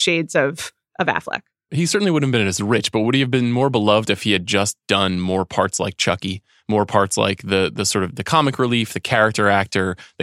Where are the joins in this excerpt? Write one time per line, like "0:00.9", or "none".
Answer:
0:01.7